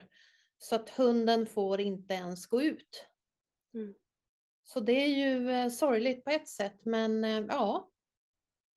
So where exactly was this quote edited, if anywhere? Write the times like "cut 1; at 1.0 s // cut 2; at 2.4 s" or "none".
none